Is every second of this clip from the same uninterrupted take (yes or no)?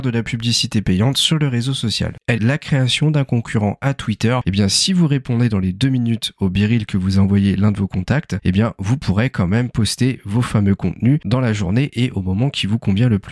no